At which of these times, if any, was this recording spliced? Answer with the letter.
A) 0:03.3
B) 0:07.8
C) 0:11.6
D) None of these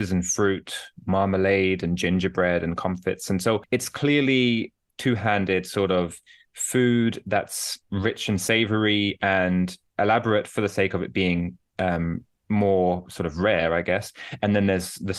B